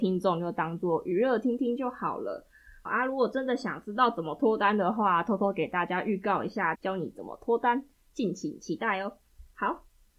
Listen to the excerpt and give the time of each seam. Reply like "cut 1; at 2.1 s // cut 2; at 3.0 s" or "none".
cut 1; at 2.8 s // cut 2; at 6.7 s